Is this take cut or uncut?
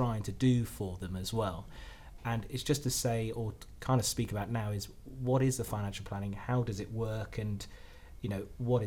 uncut